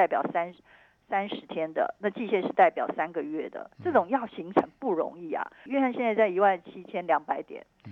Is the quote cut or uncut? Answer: cut